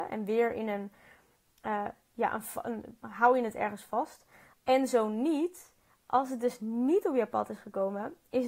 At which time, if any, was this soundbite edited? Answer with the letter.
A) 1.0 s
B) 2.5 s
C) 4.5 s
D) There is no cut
C